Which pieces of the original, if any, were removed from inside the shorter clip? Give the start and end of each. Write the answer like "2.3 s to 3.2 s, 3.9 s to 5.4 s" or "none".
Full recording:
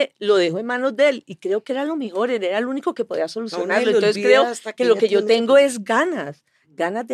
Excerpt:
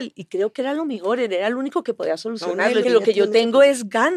3.9 s to 4.8 s